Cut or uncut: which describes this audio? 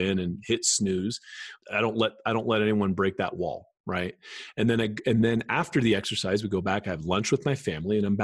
cut